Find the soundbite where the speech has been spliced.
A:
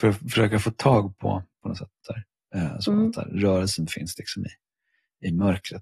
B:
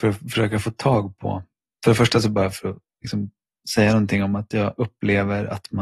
A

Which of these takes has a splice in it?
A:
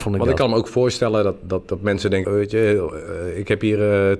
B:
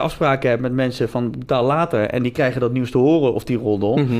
A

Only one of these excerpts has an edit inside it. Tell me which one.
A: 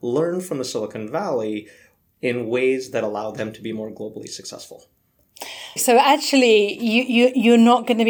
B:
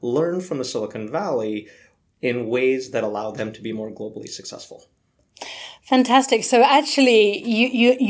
A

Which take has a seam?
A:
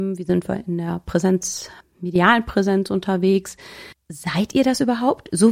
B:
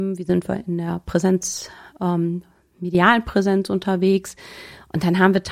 A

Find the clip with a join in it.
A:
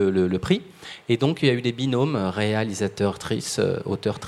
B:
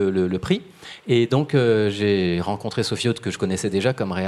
B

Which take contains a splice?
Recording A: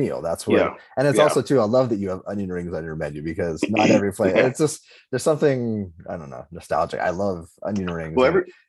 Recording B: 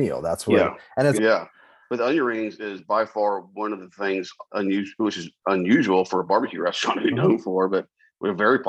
B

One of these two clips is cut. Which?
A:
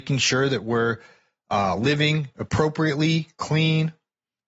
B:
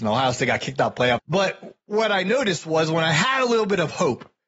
B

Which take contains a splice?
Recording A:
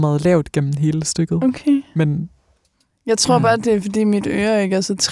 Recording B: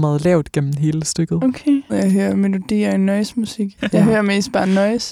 B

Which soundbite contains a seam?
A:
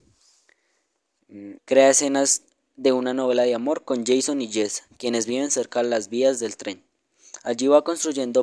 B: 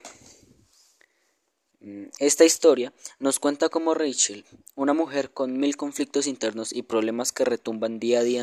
A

